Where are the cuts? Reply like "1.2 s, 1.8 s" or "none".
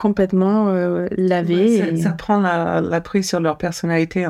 none